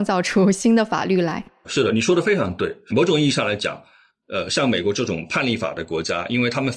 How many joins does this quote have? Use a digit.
0